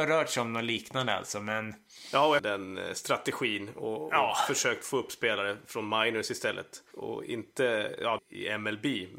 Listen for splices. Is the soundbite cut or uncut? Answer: cut